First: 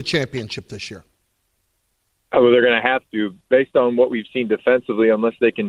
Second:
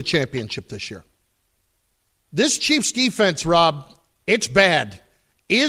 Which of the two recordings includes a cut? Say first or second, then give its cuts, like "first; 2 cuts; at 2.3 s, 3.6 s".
second; 1 cut; at 2.2 s